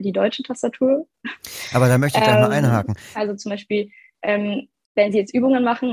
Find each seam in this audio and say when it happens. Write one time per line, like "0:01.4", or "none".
0:03.1